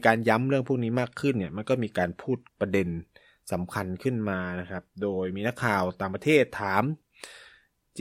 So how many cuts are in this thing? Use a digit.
1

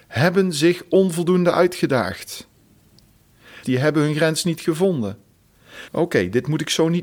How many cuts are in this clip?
2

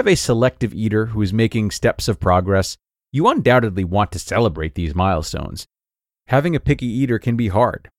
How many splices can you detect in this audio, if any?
0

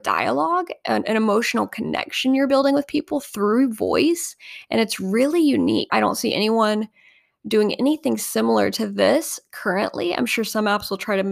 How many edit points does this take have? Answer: 1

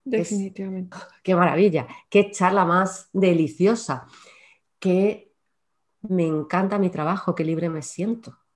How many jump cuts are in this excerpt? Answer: 1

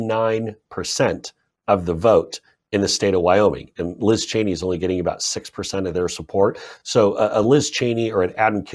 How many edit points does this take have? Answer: 0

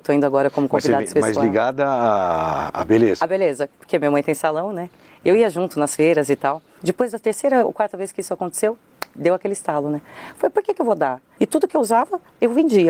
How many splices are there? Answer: 2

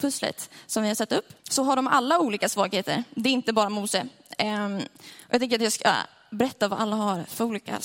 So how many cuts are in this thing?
1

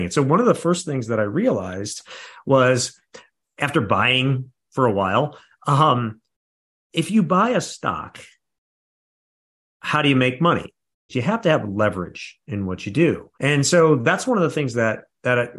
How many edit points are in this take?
2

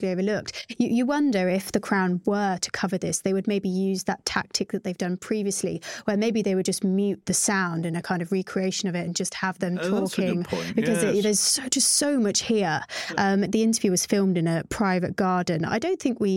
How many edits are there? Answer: 0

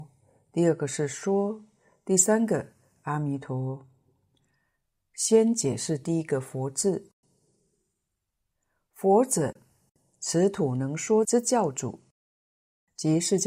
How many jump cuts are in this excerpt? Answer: 0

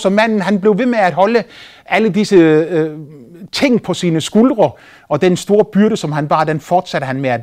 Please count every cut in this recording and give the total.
0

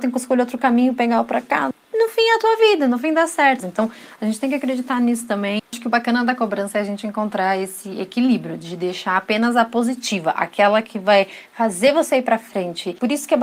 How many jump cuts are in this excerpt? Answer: 2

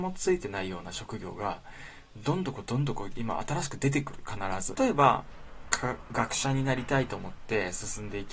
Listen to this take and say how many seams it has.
1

